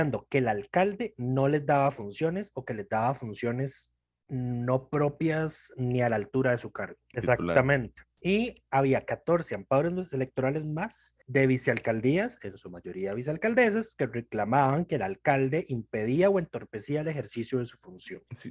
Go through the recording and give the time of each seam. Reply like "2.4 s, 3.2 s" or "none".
7.1 s, 11.2 s